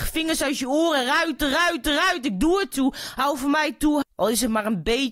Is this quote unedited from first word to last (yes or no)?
no